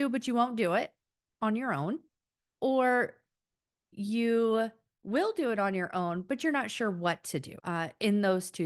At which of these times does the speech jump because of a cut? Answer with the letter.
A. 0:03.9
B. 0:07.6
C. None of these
B